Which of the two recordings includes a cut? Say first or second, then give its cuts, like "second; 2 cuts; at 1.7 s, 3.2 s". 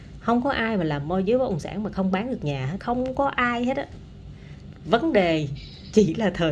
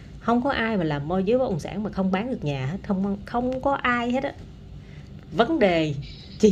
first; 1 cut; at 2.8 s